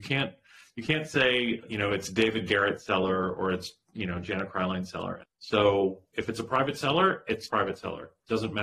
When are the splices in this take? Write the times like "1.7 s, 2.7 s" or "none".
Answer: 5.2 s, 7.5 s